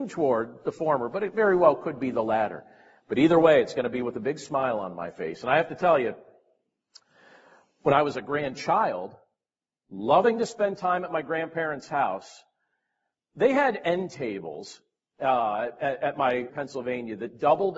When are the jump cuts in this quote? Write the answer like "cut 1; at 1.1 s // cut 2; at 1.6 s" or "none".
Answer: cut 1; at 16.5 s